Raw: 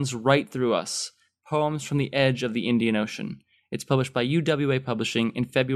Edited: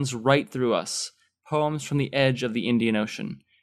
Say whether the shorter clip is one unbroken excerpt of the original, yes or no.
yes